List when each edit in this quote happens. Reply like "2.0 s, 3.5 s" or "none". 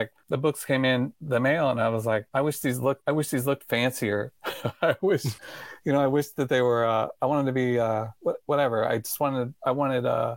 none